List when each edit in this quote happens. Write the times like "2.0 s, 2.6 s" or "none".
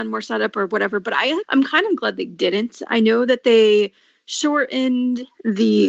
1.4 s